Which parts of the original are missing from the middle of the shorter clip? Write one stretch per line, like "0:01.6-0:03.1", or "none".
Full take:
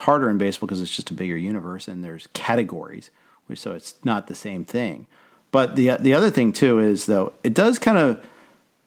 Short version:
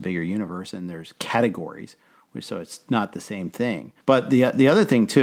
0:05.2-0:05.5